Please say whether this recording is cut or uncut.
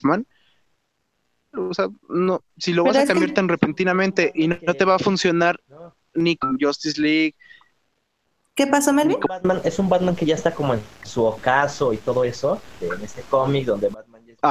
cut